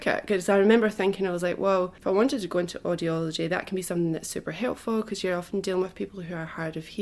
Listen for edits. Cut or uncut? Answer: cut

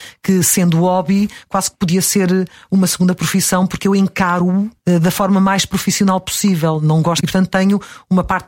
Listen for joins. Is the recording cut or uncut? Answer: cut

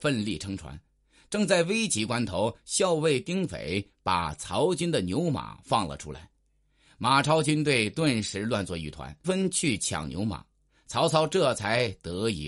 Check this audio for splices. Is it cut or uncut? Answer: cut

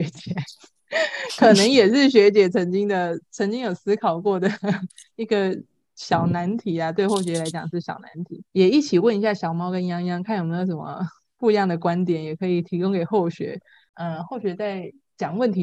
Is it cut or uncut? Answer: cut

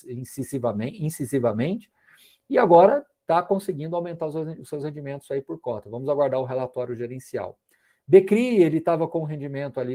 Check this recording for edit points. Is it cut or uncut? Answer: uncut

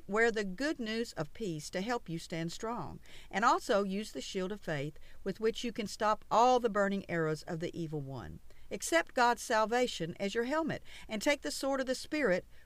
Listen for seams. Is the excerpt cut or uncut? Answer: uncut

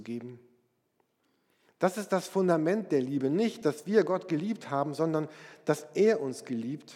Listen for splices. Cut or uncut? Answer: uncut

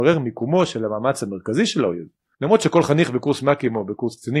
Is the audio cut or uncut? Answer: cut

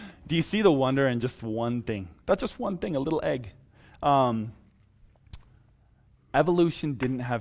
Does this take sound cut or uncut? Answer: uncut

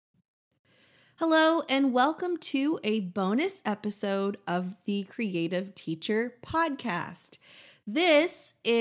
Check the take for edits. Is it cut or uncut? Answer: uncut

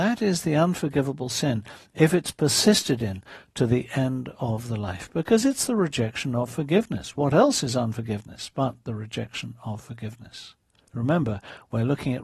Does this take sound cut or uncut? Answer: cut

